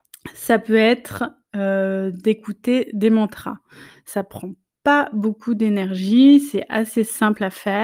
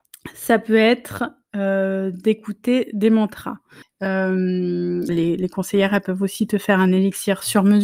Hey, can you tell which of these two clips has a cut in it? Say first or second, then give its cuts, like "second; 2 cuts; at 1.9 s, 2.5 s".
second; 2 cuts; at 3.8 s, 5.1 s